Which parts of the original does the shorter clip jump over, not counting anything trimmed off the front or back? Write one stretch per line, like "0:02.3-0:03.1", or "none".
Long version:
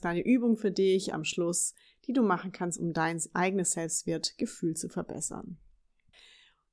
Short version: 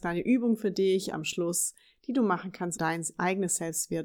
0:02.8-0:02.9